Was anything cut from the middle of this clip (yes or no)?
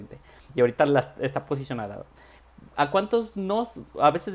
no